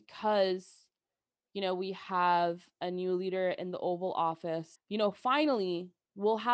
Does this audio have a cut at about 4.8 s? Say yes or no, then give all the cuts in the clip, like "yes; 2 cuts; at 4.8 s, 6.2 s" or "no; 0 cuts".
yes; 1 cut; at 4.8 s